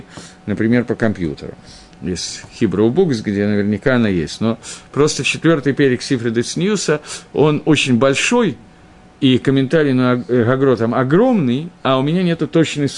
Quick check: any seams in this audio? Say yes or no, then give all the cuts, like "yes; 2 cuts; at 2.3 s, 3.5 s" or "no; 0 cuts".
no; 0 cuts